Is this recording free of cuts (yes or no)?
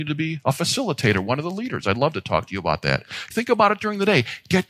no